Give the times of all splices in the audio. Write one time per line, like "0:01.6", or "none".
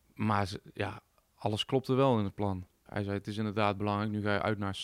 0:02.9